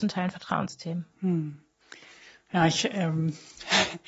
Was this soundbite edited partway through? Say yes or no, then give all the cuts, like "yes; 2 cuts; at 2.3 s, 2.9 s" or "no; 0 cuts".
no; 0 cuts